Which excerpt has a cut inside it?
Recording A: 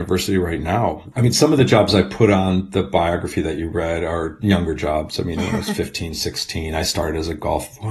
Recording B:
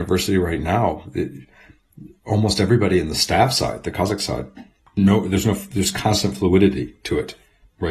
A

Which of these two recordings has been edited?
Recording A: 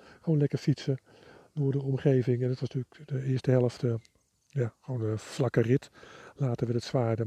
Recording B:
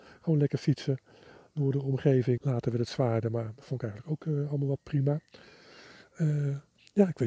B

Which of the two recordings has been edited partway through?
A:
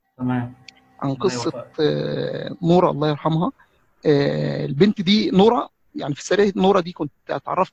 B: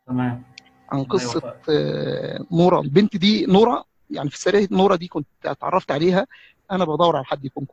B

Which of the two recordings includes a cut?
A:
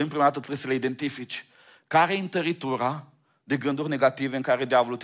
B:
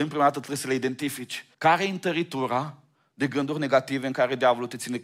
B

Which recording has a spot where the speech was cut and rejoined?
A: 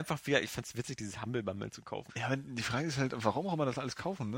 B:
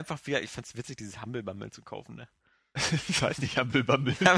A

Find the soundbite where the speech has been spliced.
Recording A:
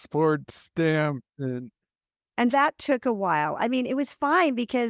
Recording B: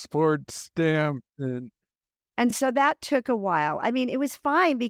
A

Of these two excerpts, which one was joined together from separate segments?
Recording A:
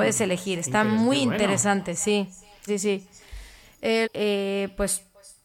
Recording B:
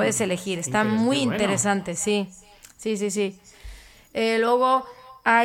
A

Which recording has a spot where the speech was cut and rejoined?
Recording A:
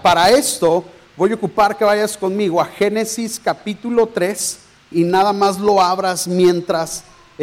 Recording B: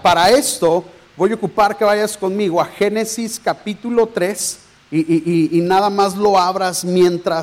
A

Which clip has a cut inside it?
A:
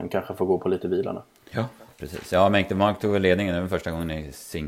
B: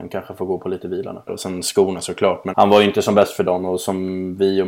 B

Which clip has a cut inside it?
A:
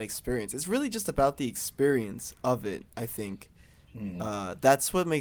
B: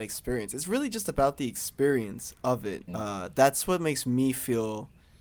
B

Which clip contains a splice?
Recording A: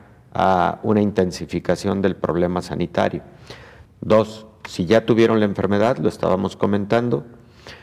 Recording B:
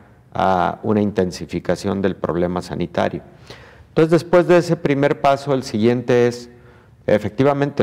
A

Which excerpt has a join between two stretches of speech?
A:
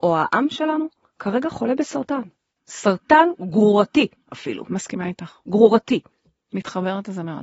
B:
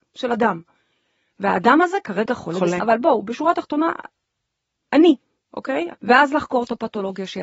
B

